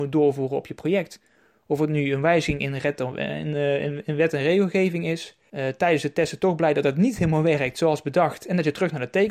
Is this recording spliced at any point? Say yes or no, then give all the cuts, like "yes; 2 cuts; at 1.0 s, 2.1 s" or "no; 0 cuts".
yes; 2 cuts; at 3.5 s, 5.5 s